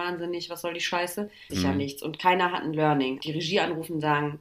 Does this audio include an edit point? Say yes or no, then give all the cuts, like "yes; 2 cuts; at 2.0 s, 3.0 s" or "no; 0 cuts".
yes; 2 cuts; at 1.5 s, 3.2 s